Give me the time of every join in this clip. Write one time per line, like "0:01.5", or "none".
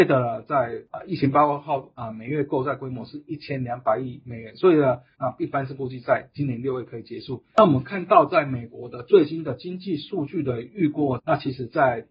0:05.1
0:07.6
0:11.2